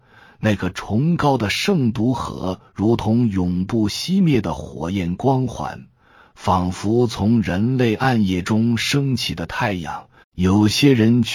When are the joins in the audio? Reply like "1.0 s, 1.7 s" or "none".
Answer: 10.2 s